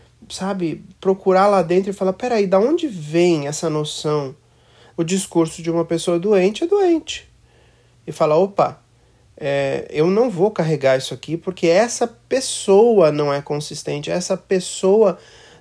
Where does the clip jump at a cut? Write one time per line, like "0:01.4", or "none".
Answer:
0:04.9
0:07.9